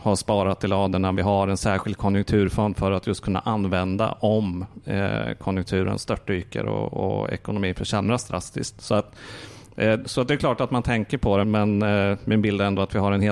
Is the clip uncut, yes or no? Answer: no